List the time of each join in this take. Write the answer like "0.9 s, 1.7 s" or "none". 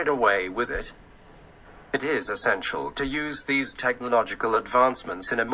none